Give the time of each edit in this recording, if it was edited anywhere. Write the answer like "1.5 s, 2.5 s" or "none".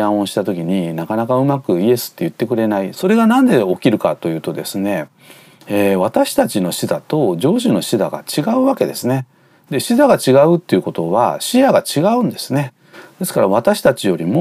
2.9 s

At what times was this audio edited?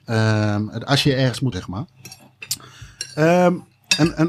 1.5 s

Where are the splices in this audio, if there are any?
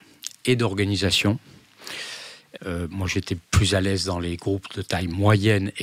2.6 s

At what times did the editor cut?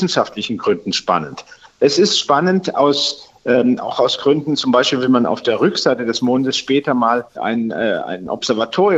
7.4 s

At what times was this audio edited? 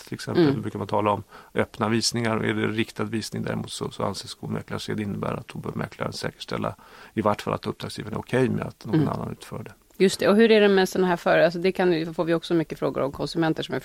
none

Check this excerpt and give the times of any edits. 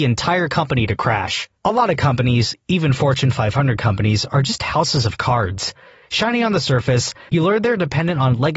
1.6 s, 7.3 s

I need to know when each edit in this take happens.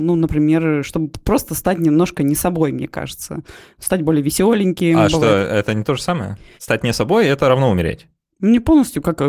6.6 s

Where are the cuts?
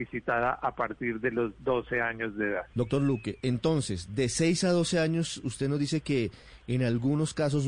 2.7 s

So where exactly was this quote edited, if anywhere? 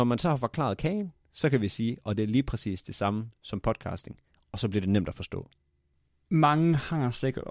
none

